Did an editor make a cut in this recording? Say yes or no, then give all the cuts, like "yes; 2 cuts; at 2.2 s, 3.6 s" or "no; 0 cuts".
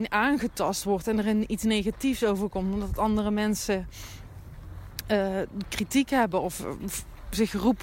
no; 0 cuts